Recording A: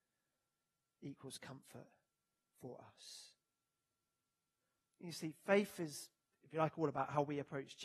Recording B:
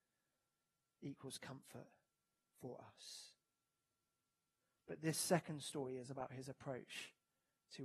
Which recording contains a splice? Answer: B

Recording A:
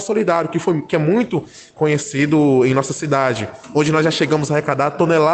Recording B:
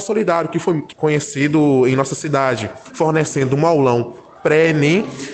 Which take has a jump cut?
B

